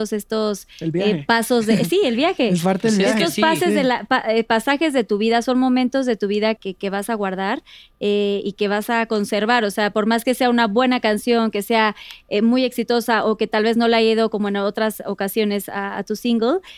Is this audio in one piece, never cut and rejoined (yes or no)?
no